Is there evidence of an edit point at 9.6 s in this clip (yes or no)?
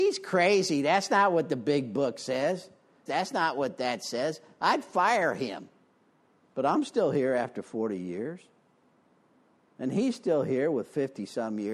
no